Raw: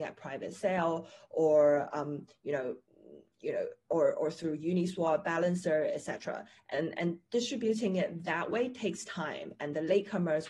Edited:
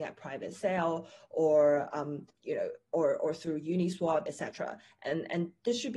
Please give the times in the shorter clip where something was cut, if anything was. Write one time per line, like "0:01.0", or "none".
0:02.3
0:04.3